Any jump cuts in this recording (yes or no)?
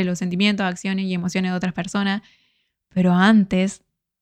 no